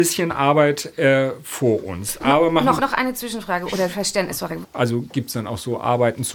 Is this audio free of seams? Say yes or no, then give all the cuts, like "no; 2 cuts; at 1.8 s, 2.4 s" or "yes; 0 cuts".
no; 2 cuts; at 2.8 s, 4.6 s